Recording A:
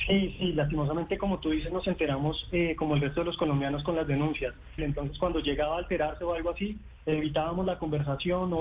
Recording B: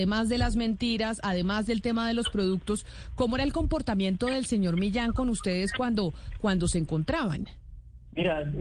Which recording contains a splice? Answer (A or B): A